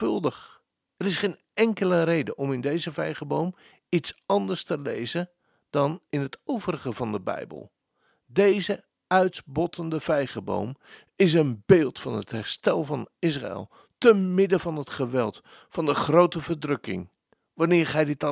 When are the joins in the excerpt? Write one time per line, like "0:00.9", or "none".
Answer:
0:00.9